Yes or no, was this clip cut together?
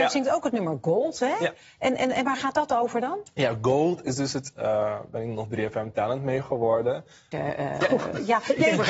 yes